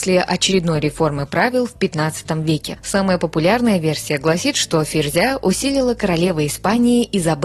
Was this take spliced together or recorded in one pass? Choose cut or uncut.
cut